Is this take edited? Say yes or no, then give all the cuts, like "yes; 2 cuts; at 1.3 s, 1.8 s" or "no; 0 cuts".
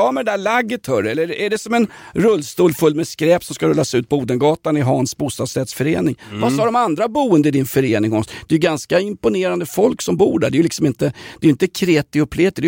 no; 0 cuts